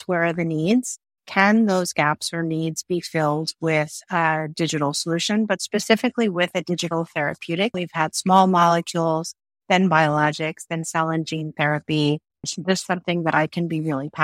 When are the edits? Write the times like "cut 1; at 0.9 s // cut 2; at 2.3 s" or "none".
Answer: cut 1; at 7.7 s // cut 2; at 12.4 s